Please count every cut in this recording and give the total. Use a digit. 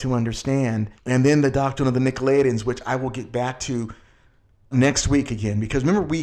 2